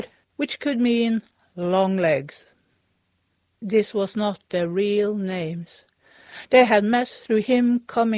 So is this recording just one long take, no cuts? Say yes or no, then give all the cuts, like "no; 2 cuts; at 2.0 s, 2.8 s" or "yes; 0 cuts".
yes; 0 cuts